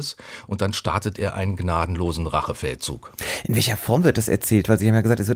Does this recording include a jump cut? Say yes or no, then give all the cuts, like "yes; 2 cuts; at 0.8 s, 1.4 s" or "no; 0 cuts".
no; 0 cuts